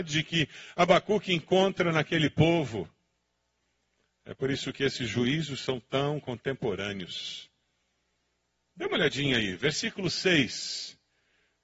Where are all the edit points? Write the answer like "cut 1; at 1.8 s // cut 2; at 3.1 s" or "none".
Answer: none